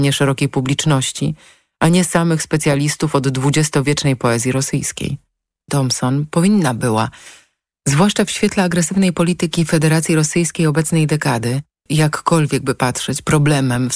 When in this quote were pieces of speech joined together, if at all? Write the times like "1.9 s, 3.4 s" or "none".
5.7 s, 11.9 s